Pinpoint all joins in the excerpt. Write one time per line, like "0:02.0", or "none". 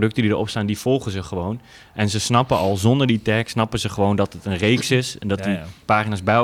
none